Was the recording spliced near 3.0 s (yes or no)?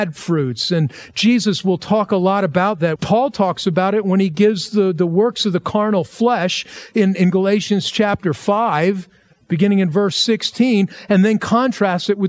yes